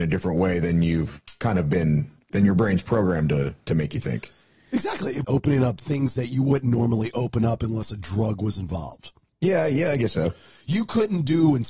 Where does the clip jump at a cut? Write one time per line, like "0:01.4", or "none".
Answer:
0:05.2

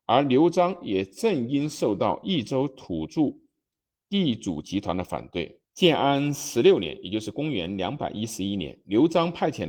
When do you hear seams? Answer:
0:05.6

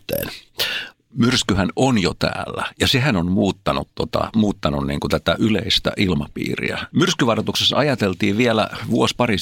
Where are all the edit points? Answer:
0:00.9

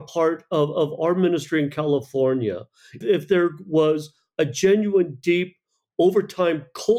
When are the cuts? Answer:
0:03.0

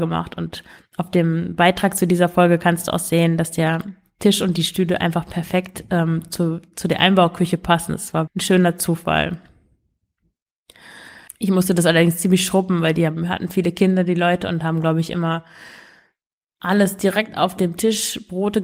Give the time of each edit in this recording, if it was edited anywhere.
0:08.3
0:11.3

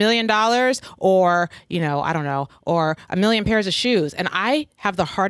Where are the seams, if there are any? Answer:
none

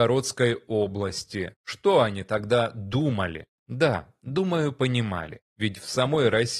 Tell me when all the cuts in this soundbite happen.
0:03.6

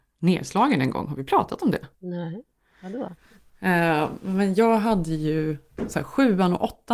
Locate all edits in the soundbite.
0:01.9

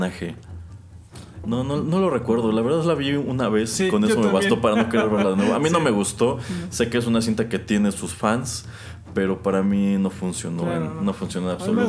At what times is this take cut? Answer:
0:01.4

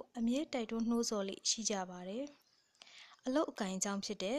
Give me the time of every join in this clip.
0:02.4

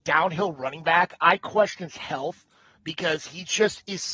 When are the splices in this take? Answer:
none

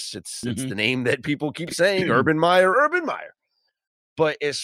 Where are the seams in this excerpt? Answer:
0:02.7

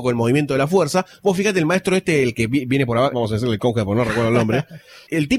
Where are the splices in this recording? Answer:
0:03.1

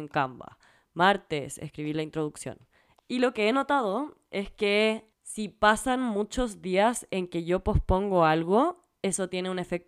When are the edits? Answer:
0:03.0
0:05.1

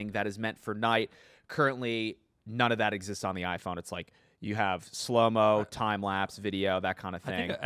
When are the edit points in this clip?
none

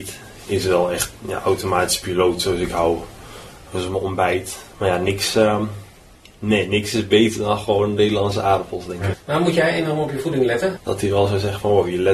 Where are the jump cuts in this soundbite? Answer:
0:04.7
0:09.1
0:10.8

